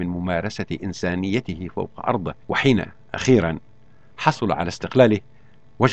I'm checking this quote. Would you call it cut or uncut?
cut